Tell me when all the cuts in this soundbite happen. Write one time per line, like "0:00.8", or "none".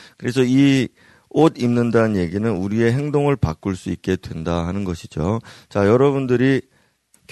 none